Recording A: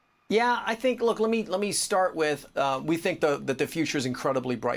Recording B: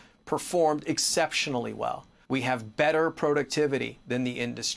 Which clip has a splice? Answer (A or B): B